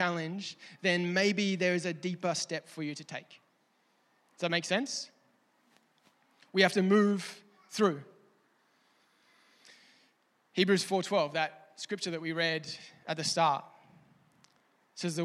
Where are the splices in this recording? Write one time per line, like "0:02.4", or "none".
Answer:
none

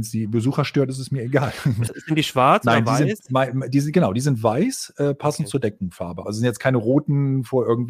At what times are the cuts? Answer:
0:01.9
0:06.2

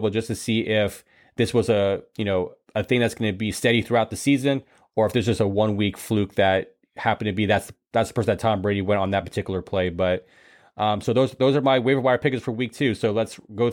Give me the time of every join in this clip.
none

